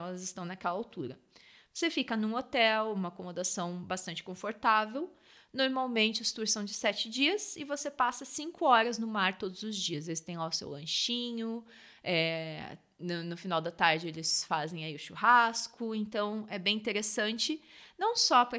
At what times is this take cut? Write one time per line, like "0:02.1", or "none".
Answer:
none